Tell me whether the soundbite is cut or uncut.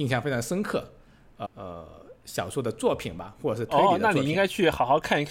cut